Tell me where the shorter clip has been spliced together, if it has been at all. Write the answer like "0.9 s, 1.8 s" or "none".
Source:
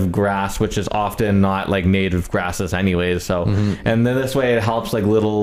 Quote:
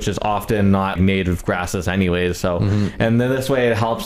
1.0 s